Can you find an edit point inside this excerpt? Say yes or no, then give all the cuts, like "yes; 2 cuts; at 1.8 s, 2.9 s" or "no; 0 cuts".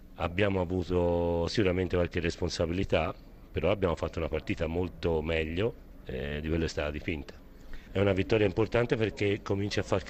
yes; 1 cut; at 7.9 s